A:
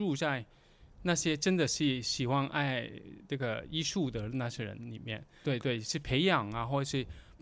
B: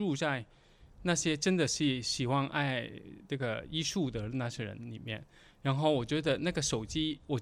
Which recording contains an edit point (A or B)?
A